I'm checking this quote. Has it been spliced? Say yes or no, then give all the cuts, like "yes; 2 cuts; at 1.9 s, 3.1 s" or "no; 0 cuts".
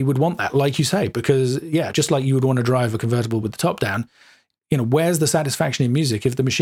no; 0 cuts